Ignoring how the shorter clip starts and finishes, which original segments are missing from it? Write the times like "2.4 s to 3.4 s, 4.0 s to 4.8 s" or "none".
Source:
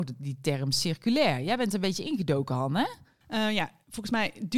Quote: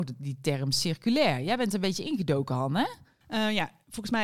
none